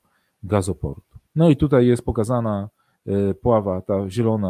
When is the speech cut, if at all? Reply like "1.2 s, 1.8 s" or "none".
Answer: 1.3 s